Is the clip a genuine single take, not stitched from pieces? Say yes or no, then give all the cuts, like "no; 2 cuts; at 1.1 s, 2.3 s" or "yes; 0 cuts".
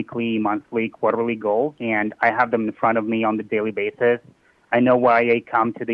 yes; 0 cuts